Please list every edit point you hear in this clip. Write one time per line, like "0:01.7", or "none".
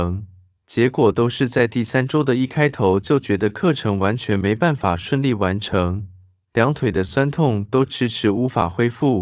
none